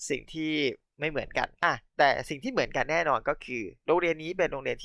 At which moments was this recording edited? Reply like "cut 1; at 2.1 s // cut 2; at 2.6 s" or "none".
cut 1; at 1.5 s

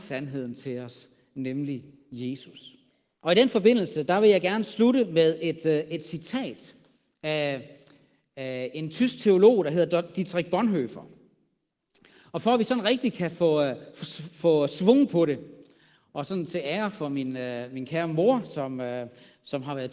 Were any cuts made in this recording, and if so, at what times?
cut 1; at 3.1 s

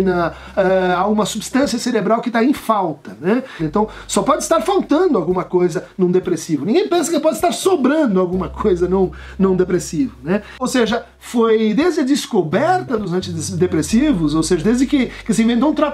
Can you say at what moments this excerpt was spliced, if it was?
cut 1; at 3.6 s

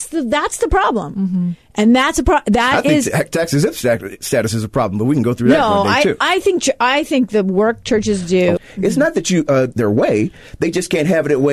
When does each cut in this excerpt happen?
cut 1; at 8.6 s // cut 2; at 9.7 s

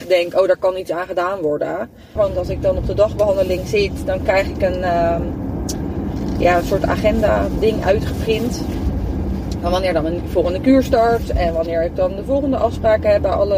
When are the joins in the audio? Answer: cut 1; at 2.2 s

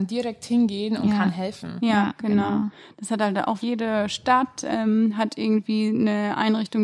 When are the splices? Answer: cut 1; at 3.6 s

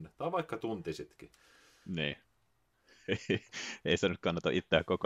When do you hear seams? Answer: cut 1; at 2.5 s

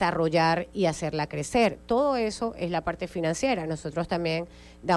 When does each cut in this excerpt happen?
none

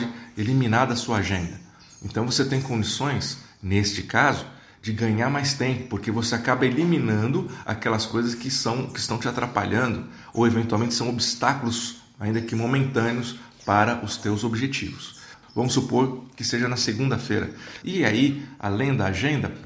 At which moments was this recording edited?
cut 1; at 15.4 s // cut 2; at 17.8 s

